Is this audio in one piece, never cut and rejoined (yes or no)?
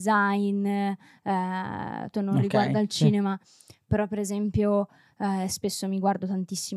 no